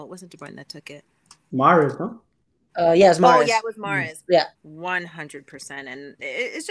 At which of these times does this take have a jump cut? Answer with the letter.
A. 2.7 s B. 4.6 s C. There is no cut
B